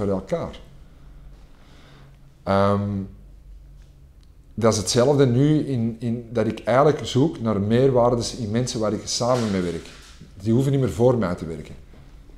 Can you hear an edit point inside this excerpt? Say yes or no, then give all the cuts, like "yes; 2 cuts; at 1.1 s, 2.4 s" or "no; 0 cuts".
no; 0 cuts